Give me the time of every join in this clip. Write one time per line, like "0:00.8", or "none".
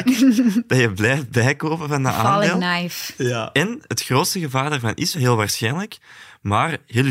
0:05.1